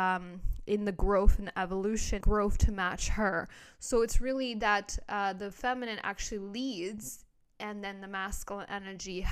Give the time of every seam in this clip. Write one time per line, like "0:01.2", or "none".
0:02.2